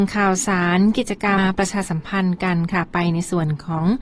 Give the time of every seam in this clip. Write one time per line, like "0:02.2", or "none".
0:01.4

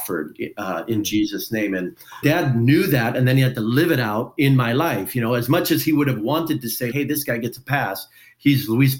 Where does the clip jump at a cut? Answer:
0:02.2
0:06.9

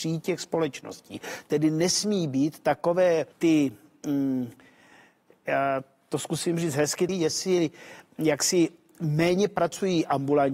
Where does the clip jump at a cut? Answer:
0:03.3
0:07.1

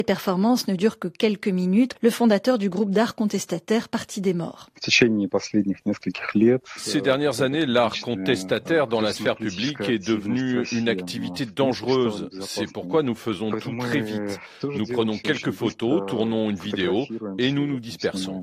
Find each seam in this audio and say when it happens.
0:01.9

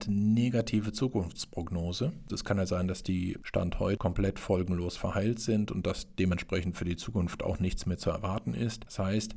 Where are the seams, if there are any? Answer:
0:02.3
0:04.0

